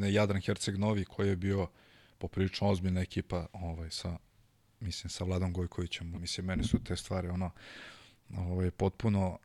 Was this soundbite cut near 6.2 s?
yes; 1 cut; at 6.2 s

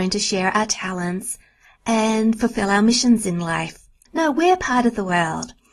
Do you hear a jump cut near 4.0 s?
yes; 1 cut; at 4.0 s

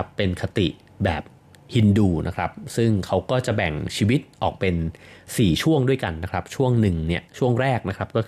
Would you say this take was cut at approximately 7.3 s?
yes; 1 cut; at 7.3 s

